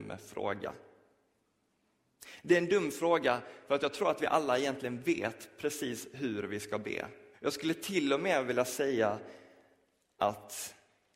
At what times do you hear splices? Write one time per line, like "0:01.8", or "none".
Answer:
0:07.3